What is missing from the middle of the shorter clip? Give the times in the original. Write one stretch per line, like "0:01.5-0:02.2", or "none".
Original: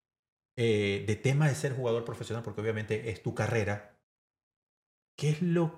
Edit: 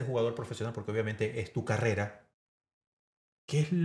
none